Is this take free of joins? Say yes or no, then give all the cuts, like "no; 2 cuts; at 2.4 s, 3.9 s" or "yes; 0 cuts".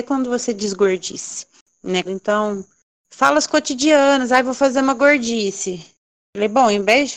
no; 1 cut; at 2.0 s